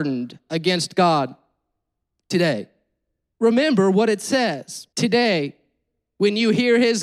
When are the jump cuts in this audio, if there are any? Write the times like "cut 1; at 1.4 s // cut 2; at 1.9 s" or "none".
cut 1; at 3.3 s // cut 2; at 4.9 s